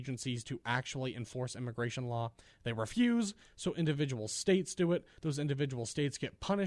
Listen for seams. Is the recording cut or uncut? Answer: uncut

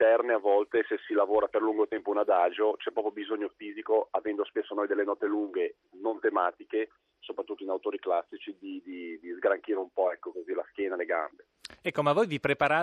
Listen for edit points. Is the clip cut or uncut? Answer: uncut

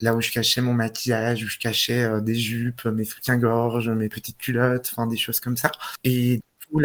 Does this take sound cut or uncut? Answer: uncut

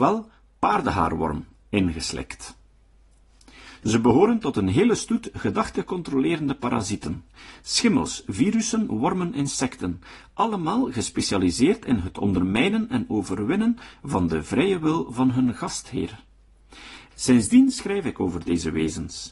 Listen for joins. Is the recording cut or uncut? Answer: cut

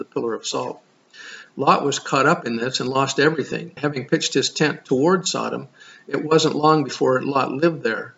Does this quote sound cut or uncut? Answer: cut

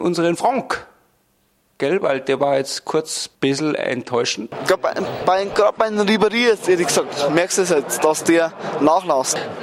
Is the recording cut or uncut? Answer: cut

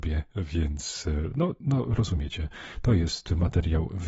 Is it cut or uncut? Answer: uncut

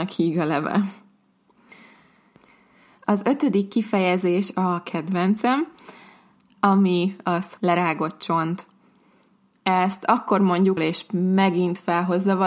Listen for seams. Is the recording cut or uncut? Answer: cut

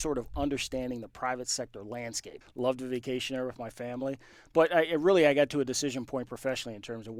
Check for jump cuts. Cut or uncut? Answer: cut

